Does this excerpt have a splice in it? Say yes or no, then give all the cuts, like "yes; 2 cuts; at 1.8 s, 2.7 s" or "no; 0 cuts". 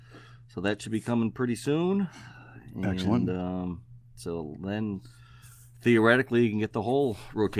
no; 0 cuts